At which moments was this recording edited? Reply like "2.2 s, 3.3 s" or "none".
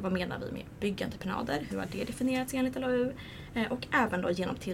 none